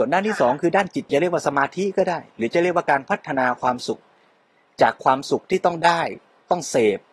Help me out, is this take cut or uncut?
cut